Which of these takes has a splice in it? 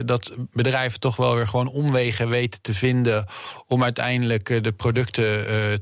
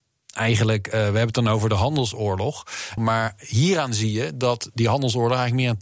second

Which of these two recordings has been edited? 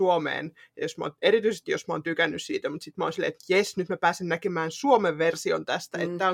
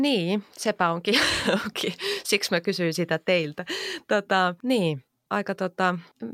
second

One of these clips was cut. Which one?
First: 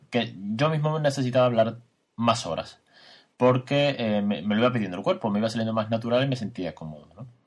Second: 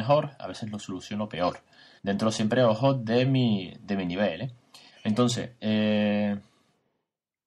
second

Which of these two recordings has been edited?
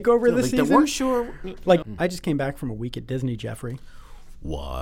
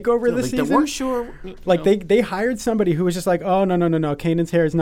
first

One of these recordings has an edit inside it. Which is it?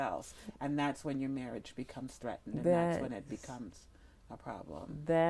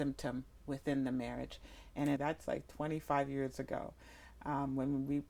second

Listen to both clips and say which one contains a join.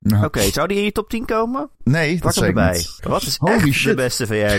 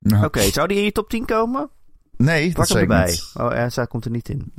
first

